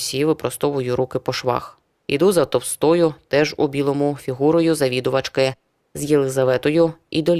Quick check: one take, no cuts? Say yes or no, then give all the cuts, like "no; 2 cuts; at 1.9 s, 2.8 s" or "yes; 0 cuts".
yes; 0 cuts